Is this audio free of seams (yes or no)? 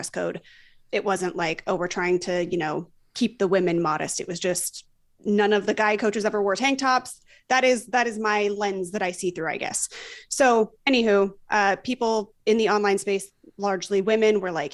yes